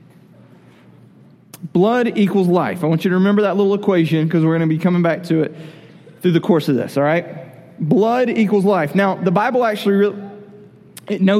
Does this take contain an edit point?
no; 0 cuts

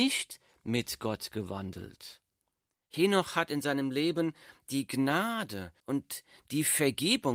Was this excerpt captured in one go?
no; 2 cuts; at 2.7 s, 5.8 s

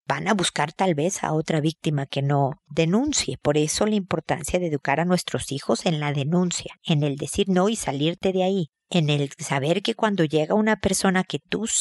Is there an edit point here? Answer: yes; 1 cut; at 6.8 s

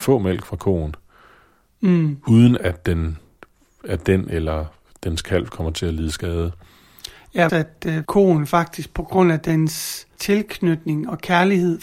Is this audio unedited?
no; 1 cut; at 7.5 s

